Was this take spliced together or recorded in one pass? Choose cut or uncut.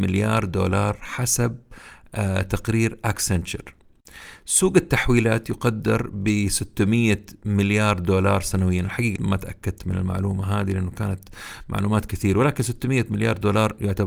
cut